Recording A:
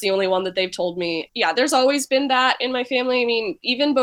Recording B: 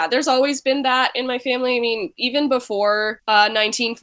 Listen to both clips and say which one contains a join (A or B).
A